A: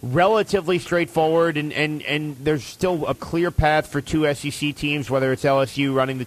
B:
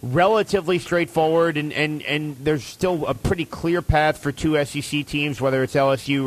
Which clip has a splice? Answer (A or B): A